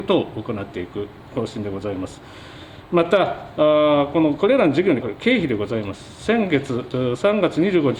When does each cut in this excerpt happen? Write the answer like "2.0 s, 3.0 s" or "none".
5.0 s